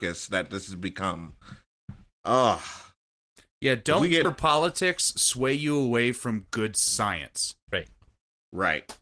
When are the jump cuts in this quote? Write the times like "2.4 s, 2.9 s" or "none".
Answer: 4.2 s